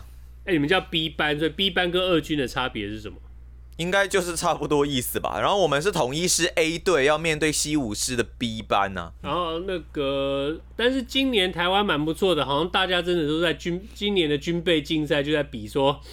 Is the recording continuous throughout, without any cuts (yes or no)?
yes